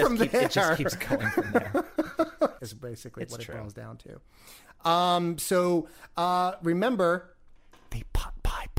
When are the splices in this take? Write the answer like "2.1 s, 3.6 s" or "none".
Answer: 2.6 s